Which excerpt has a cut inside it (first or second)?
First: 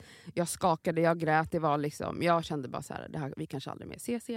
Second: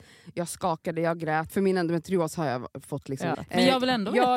second